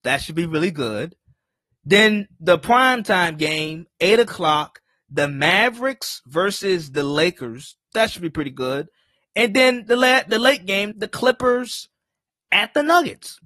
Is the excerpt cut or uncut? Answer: cut